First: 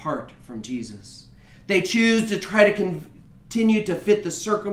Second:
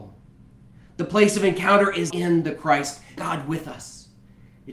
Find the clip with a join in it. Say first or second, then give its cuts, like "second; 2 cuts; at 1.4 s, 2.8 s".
second; 2 cuts; at 2.1 s, 3.2 s